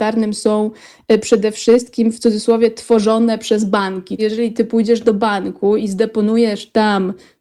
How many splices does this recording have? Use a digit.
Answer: 1